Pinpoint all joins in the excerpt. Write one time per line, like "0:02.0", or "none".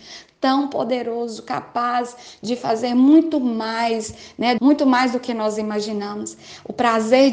0:04.6